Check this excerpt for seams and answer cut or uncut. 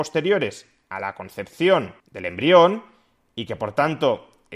cut